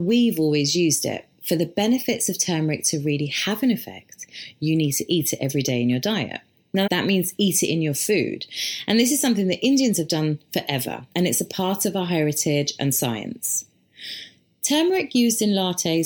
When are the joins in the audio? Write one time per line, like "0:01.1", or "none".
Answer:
0:06.9